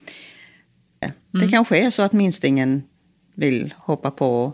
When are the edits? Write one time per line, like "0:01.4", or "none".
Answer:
0:01.0